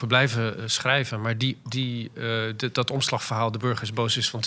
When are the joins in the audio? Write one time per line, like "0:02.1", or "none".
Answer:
none